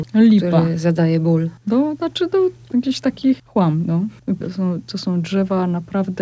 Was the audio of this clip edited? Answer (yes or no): yes